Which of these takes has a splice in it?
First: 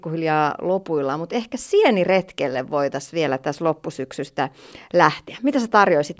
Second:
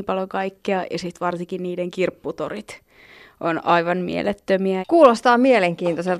second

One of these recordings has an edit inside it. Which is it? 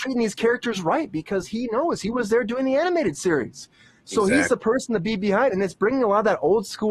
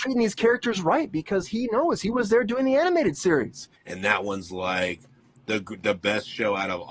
second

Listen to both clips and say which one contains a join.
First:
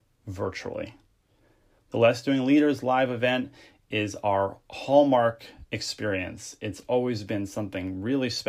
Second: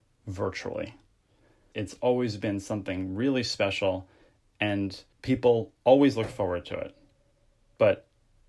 second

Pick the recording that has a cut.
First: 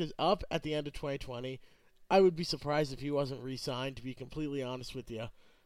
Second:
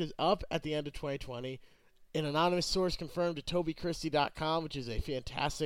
second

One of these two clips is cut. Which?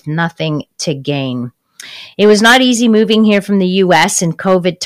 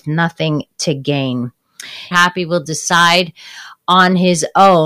second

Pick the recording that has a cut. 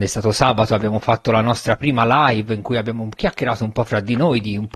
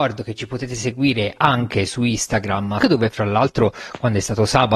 second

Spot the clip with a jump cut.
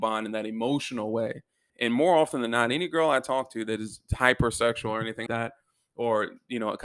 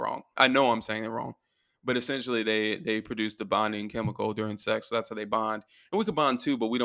first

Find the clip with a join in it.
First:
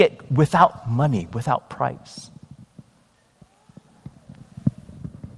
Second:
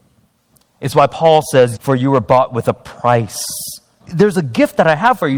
second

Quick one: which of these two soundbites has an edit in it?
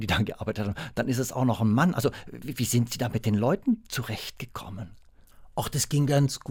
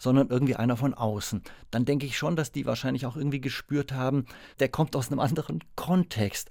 second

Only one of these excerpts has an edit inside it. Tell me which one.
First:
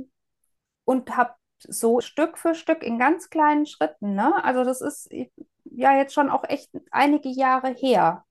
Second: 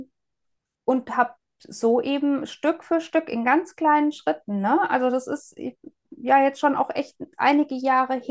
first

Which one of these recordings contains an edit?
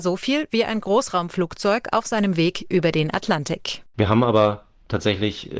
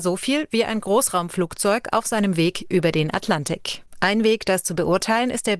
second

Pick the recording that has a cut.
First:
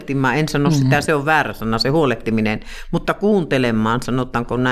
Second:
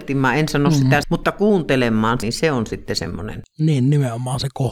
second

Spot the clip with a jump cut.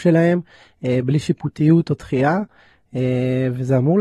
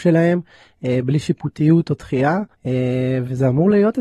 second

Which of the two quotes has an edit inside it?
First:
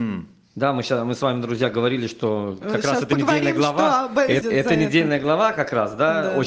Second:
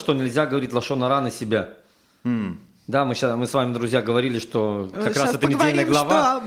first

